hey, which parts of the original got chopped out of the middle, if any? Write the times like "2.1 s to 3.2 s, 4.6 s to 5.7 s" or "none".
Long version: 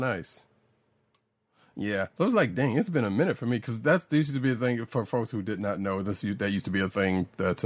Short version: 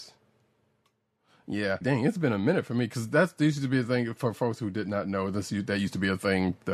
2.1 s to 2.5 s